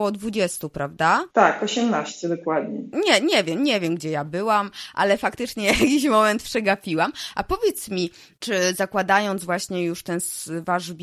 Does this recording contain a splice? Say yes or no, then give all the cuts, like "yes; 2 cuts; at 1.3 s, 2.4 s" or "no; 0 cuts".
no; 0 cuts